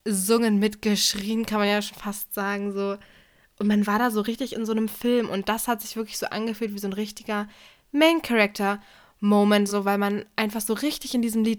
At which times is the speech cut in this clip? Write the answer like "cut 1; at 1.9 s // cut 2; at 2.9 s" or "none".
none

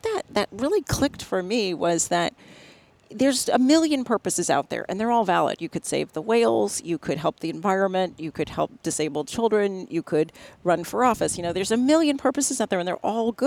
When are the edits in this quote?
none

